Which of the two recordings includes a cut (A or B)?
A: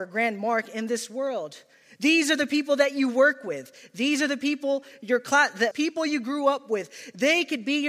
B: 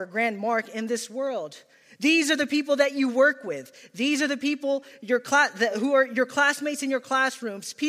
A